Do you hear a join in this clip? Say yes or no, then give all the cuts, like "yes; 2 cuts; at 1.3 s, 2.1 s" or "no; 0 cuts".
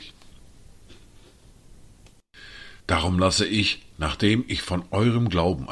yes; 1 cut; at 2.8 s